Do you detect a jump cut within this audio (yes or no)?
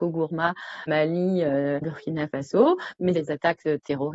yes